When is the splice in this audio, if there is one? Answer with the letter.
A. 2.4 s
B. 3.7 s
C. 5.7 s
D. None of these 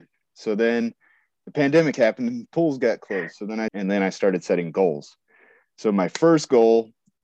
B